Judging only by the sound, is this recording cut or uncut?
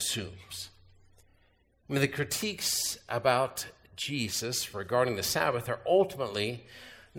uncut